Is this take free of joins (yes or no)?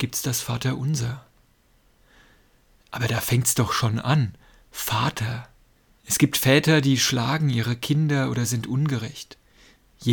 yes